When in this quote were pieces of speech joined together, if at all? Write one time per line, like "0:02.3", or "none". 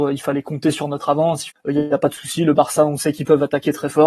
0:01.5